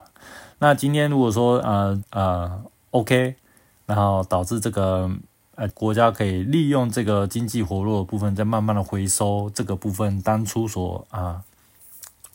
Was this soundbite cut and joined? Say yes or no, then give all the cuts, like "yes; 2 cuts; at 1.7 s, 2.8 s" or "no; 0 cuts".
yes; 2 cuts; at 2.0 s, 5.7 s